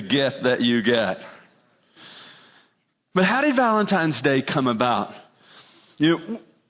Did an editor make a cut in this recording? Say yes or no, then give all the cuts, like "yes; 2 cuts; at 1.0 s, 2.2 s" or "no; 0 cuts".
no; 0 cuts